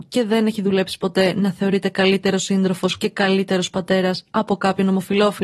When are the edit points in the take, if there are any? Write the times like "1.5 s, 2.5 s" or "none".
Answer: none